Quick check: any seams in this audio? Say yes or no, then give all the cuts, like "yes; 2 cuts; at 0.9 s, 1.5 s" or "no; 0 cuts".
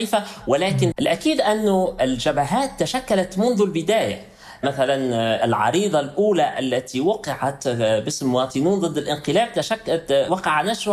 yes; 1 cut; at 0.9 s